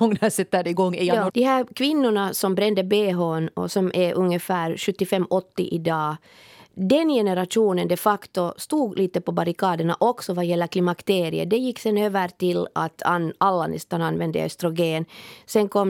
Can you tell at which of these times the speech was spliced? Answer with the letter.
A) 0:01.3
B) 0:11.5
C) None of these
A